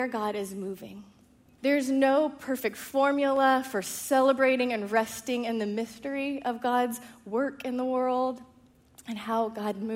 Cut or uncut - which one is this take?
cut